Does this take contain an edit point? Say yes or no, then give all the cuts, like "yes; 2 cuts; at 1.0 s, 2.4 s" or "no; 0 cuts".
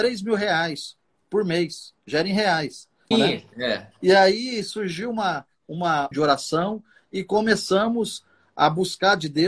yes; 2 cuts; at 3.1 s, 6.1 s